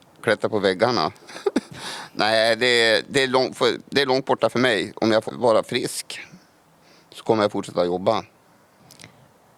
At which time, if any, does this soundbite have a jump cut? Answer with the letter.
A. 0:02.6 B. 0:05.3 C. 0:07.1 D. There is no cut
B